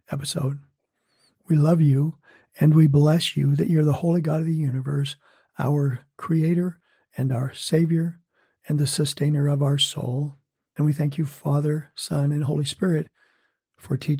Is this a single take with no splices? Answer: yes; 0 cuts

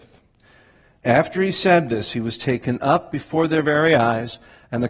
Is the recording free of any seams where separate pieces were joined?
yes; 0 cuts

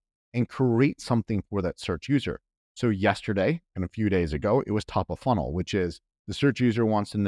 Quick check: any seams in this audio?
no; 0 cuts

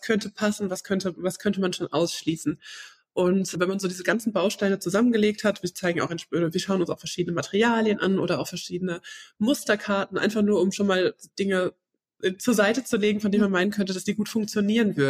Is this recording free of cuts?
yes; 0 cuts

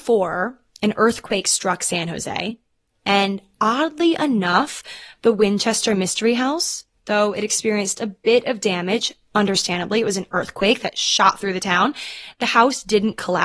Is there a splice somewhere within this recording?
no; 0 cuts

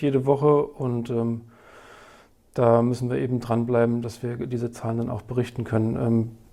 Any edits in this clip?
no; 0 cuts

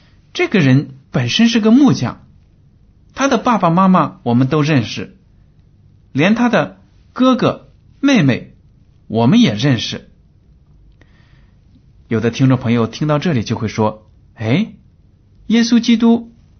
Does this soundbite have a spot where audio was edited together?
no; 0 cuts

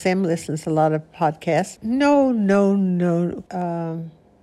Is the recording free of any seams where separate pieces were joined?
no; 2 cuts; at 1.8 s, 3.5 s

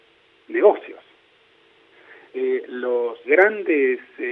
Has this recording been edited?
yes; 1 cut; at 3.2 s

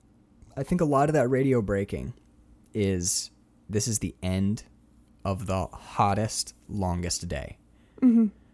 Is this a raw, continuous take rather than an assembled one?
yes; 0 cuts

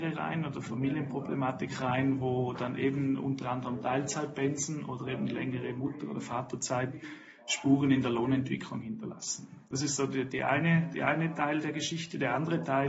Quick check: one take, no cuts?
yes; 0 cuts

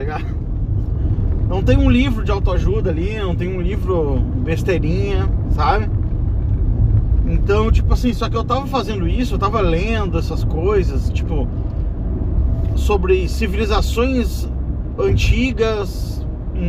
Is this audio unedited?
no; 1 cut; at 12.7 s

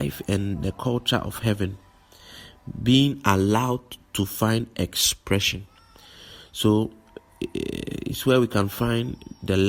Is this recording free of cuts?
yes; 0 cuts

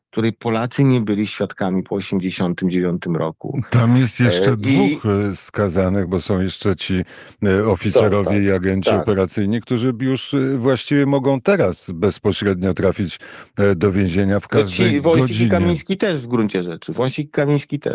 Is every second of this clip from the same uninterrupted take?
yes; 0 cuts

